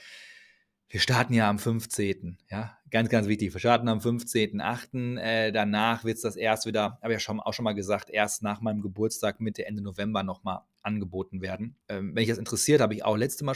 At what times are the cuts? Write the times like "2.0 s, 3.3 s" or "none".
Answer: 11.8 s